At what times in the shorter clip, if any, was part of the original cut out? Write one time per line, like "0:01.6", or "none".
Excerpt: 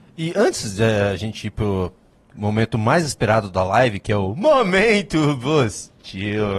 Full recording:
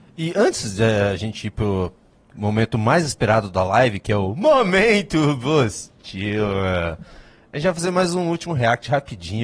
none